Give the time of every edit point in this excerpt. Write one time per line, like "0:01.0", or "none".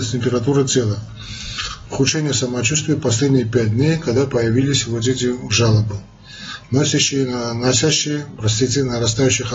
none

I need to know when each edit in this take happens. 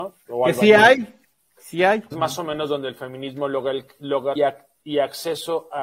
0:02.1
0:04.4

